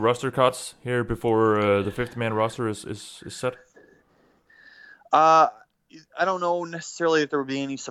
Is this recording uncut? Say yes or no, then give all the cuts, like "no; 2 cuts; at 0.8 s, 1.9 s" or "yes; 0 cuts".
yes; 0 cuts